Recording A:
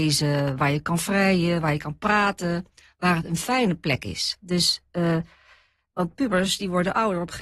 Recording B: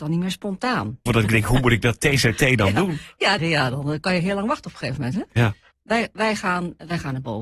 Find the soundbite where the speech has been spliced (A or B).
B